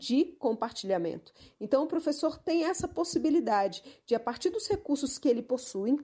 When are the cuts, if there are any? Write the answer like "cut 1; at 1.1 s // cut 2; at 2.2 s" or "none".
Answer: none